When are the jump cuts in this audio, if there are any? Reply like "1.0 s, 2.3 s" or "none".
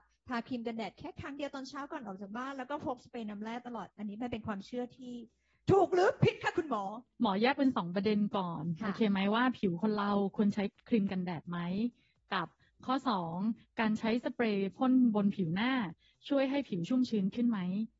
7.1 s